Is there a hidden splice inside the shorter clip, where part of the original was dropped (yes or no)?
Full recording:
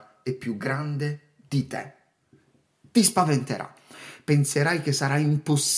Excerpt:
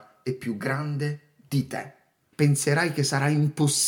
yes